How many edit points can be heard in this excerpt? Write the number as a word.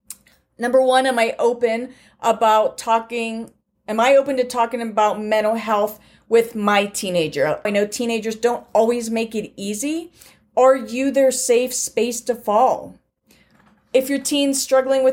one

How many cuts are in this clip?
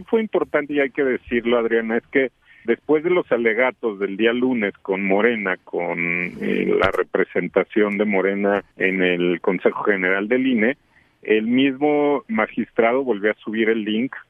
two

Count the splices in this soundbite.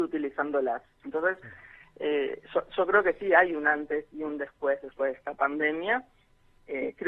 one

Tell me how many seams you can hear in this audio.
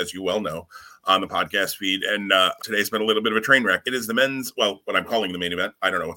two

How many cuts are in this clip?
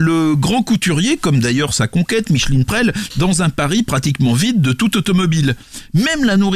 one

